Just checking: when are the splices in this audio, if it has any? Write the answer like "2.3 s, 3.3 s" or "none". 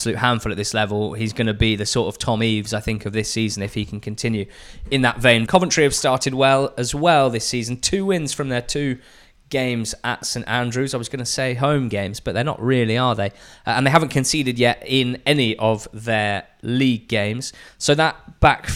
5.5 s